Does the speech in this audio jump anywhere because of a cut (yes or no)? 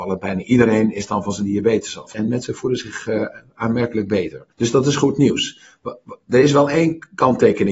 yes